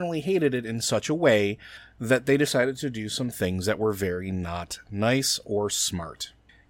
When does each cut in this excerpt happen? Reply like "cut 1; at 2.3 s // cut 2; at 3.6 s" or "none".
none